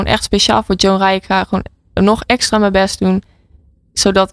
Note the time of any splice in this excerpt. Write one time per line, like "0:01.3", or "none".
none